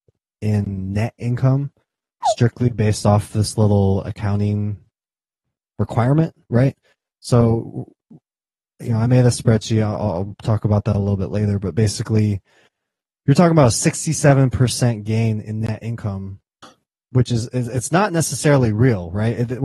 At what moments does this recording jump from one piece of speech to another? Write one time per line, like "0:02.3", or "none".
none